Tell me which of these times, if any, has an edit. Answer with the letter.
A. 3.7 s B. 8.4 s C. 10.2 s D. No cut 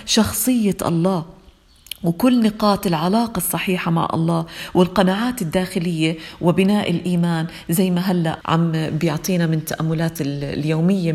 B